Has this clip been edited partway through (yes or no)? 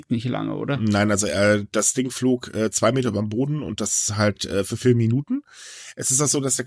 no